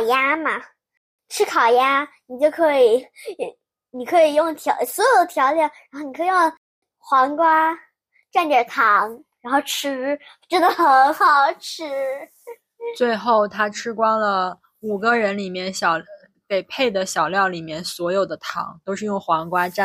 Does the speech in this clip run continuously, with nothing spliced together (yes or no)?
yes